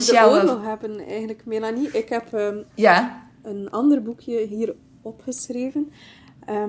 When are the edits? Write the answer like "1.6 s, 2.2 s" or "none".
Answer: none